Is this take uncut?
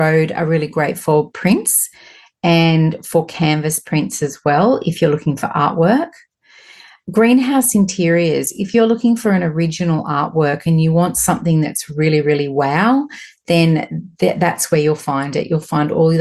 yes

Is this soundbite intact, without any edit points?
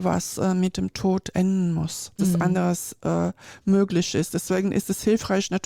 no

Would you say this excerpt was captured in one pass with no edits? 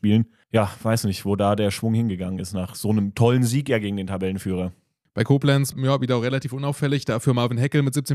no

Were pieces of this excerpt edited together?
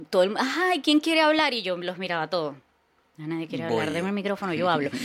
no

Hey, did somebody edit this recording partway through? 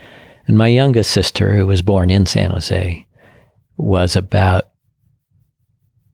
no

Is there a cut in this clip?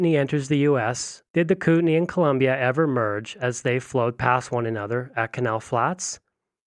yes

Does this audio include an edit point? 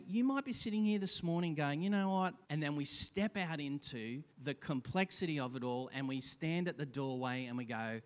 yes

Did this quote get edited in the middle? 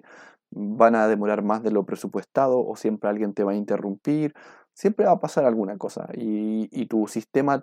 no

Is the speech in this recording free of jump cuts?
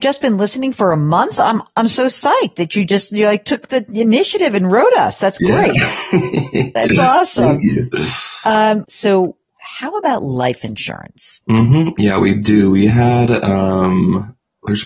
no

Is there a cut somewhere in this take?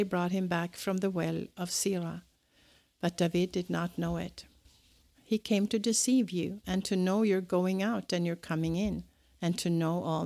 yes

